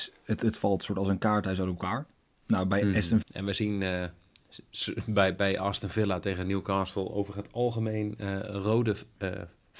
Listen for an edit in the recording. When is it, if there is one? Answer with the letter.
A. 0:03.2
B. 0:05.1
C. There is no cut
A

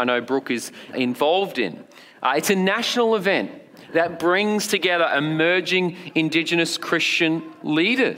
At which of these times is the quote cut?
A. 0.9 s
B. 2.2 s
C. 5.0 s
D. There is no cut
A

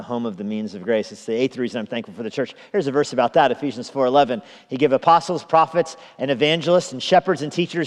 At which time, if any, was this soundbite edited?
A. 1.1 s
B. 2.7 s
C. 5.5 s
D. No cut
D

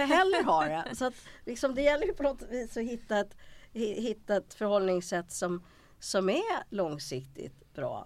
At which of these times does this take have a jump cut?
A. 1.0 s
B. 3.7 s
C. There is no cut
C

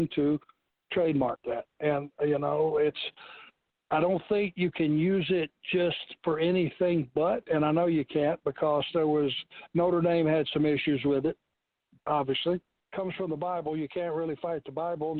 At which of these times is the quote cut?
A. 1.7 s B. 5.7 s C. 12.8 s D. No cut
C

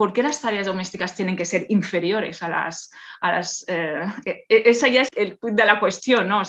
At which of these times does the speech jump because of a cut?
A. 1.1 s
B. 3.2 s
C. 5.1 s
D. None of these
C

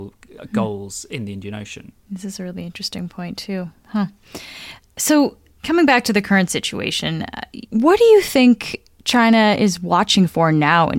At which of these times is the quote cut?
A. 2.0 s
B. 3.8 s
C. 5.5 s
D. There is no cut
D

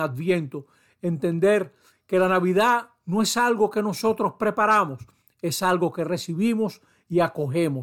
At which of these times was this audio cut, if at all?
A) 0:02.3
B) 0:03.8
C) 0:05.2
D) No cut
C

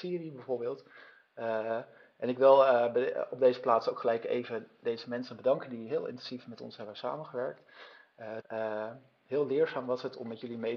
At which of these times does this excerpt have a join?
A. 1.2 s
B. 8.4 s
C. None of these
B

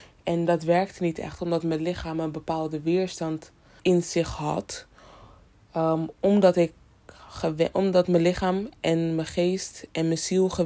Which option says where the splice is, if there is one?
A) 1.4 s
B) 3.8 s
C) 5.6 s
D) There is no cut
B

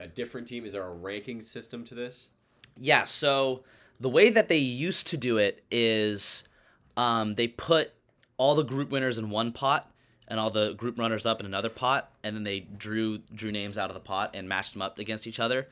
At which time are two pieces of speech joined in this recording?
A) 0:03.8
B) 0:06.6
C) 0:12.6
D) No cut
D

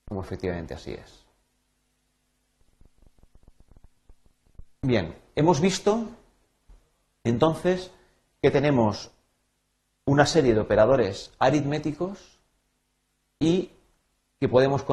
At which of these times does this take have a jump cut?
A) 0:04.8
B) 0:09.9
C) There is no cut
C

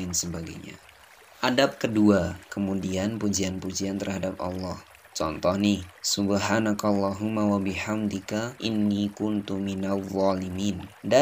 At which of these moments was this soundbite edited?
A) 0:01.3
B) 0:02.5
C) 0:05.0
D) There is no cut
B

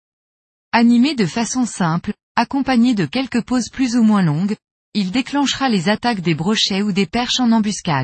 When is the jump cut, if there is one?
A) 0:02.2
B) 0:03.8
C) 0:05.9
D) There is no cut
A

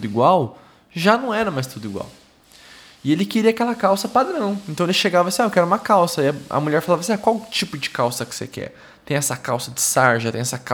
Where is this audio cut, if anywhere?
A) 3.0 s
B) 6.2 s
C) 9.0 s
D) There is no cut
D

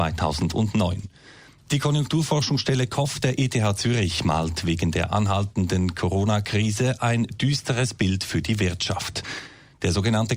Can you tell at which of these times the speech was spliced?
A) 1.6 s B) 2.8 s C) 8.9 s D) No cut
A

